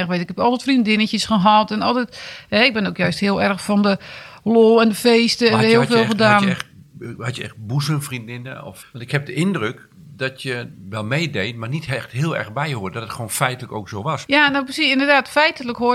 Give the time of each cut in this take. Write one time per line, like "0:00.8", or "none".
0:08.8
0:14.3